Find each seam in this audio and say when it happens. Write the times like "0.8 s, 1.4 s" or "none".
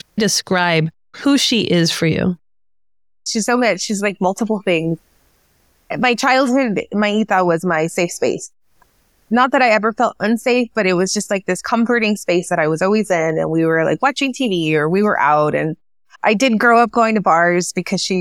none